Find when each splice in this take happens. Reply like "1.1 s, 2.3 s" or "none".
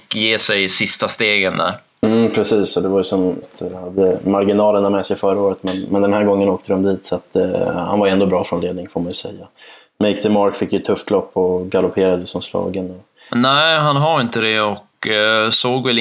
3.4 s, 13.3 s